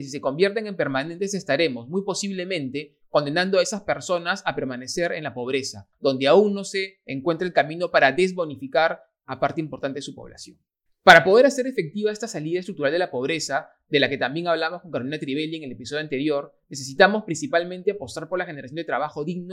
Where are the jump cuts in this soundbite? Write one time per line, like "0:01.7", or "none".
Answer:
0:05.9